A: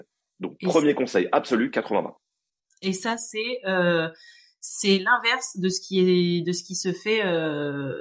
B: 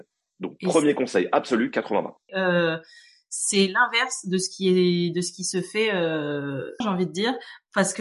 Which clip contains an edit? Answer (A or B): B